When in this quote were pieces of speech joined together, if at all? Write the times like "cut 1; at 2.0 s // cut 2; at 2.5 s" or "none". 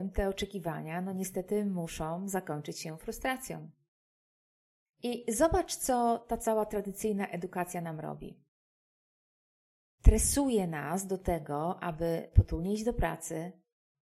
none